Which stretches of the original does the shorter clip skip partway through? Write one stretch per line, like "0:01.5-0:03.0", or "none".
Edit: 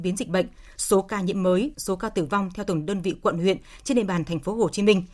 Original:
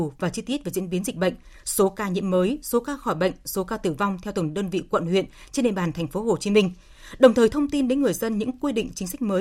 0:02.6-0:03.4